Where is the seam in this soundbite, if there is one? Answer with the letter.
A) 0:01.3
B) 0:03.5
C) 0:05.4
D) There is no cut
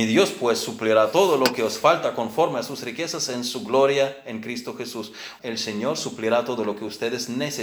C